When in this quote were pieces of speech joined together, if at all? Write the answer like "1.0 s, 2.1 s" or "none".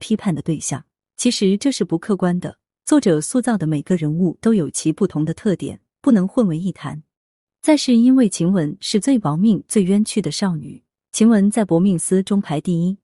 none